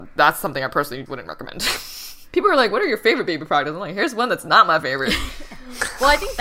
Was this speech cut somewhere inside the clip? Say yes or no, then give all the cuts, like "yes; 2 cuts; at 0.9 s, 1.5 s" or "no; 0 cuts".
yes; 1 cut; at 1.1 s